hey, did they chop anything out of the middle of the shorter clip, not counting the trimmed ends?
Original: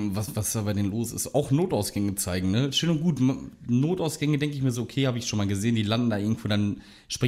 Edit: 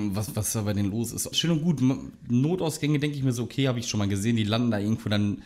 yes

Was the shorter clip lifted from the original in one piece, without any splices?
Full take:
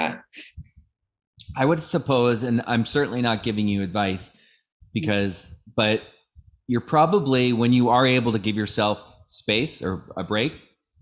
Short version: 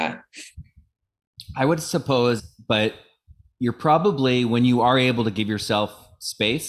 no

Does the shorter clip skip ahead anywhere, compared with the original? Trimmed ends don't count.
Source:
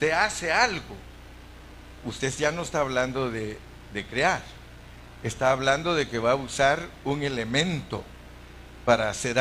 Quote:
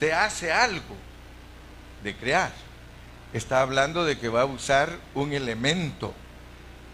yes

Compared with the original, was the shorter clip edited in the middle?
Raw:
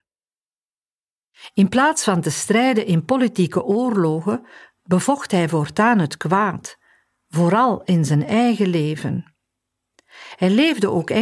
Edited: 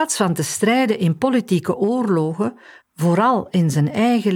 yes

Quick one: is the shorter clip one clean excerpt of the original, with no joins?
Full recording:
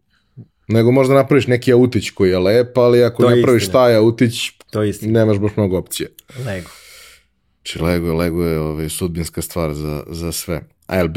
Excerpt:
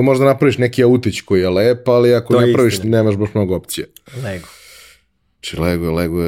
no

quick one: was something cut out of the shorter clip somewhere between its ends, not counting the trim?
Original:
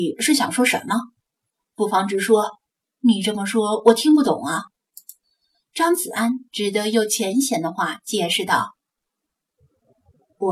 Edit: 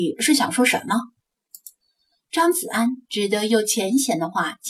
yes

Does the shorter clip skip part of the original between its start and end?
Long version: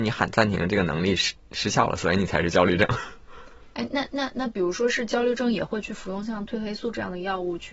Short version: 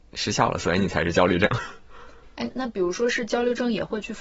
yes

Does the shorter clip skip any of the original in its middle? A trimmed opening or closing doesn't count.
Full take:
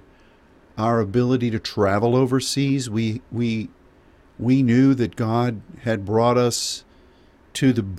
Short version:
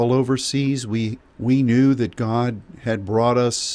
yes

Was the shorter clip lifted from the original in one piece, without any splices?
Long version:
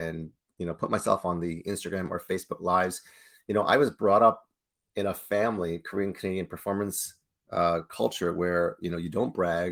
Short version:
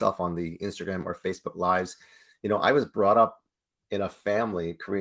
yes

